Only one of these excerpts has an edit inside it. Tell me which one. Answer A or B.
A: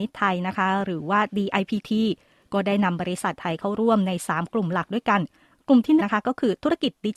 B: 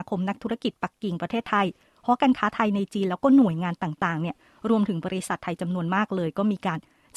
A